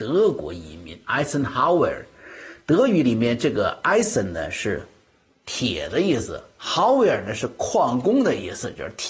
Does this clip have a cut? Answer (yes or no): no